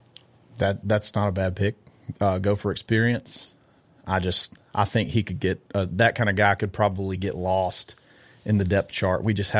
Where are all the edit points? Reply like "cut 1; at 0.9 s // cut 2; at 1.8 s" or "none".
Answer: none